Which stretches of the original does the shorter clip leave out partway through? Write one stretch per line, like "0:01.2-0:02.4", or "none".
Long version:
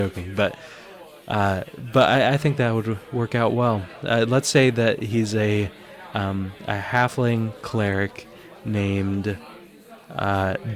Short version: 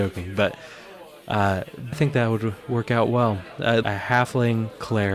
0:01.9-0:02.4
0:04.3-0:06.7